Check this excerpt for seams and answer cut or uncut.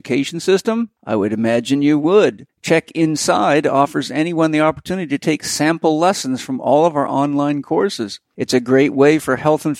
uncut